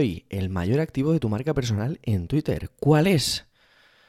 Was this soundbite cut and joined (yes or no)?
no